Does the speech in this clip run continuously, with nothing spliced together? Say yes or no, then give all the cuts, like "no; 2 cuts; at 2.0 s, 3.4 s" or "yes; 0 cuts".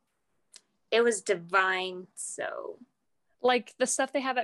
no; 1 cut; at 2.2 s